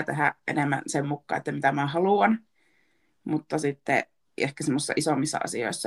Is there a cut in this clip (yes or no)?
no